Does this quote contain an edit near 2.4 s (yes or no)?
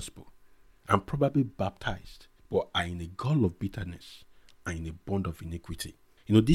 yes